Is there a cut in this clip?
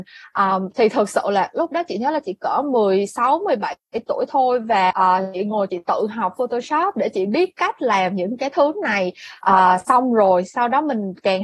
yes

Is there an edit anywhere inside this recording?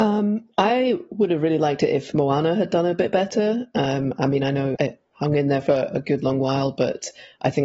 yes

